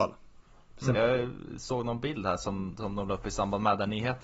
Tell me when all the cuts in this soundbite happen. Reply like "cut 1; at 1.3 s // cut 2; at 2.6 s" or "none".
cut 1; at 0.9 s